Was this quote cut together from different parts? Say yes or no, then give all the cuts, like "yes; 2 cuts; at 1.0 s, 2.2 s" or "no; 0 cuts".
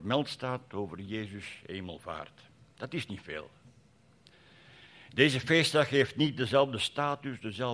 no; 0 cuts